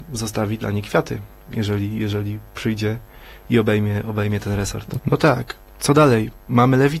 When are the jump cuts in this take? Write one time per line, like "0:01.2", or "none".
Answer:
0:05.0